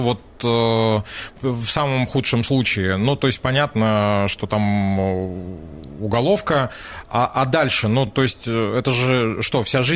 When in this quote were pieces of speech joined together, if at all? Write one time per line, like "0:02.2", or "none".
none